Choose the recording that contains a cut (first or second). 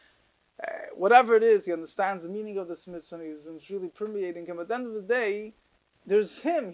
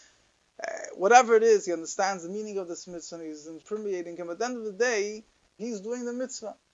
second